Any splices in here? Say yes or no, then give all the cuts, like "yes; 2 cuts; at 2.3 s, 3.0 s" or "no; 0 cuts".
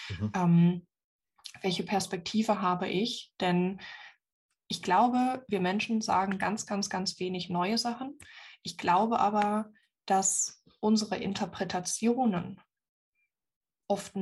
no; 0 cuts